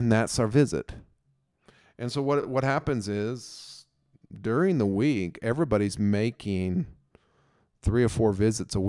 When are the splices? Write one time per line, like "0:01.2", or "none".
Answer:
none